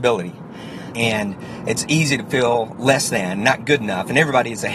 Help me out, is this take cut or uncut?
cut